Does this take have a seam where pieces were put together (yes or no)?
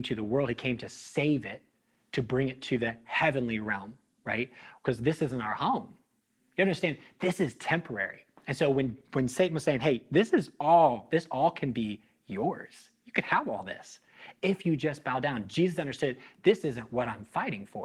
no